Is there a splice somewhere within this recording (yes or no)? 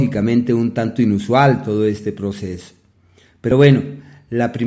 no